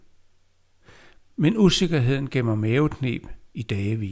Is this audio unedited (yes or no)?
yes